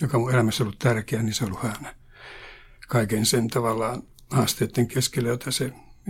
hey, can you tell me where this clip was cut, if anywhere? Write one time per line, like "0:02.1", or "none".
none